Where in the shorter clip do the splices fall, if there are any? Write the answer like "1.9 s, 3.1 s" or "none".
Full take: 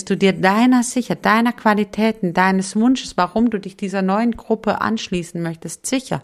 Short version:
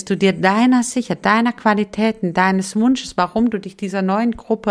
none